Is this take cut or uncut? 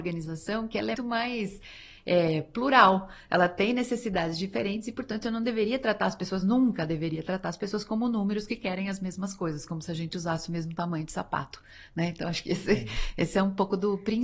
cut